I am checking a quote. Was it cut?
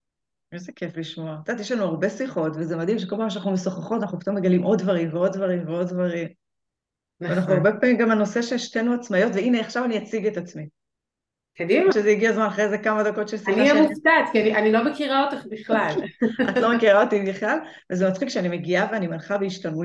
yes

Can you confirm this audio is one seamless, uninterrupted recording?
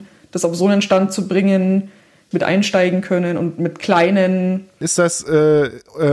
no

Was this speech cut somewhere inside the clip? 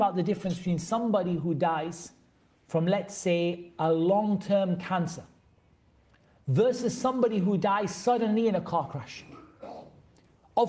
no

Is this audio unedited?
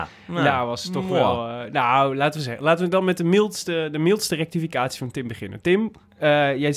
yes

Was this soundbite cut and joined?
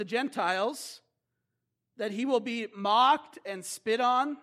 no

